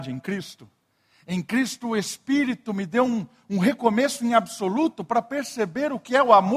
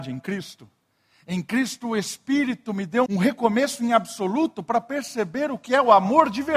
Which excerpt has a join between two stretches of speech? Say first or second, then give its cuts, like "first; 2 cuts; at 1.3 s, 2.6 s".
second; 1 cut; at 3.1 s